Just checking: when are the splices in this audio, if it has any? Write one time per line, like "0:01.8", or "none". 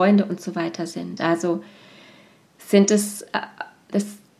none